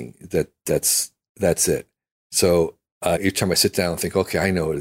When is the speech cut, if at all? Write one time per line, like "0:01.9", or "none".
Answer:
0:03.2